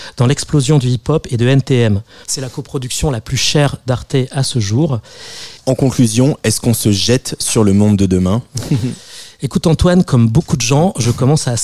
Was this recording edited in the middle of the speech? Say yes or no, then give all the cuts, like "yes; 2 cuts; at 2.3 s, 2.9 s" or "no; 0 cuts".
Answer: yes; 2 cuts; at 2.2 s, 5.6 s